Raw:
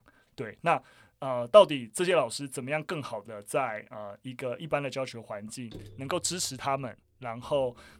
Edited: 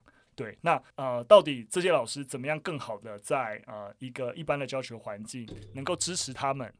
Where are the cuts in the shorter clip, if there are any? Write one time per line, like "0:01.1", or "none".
0:00.9